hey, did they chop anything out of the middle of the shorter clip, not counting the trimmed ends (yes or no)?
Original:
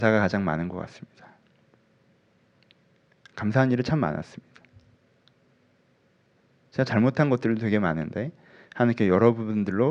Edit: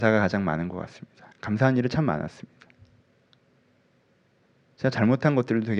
yes